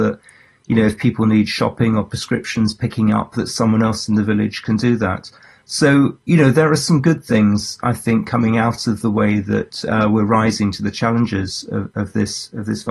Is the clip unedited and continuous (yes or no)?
yes